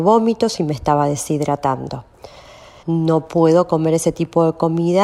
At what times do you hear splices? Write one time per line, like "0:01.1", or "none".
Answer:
0:02.8